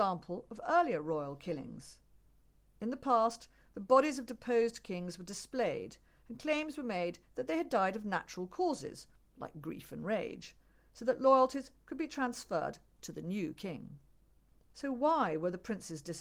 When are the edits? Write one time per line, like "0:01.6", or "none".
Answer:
0:14.6